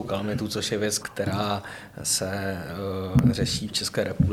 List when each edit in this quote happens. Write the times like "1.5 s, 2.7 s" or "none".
1.0 s